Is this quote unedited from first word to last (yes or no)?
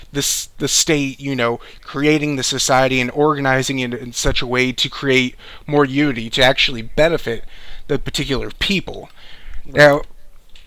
yes